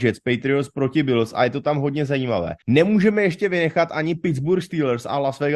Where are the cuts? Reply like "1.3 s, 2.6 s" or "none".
2.6 s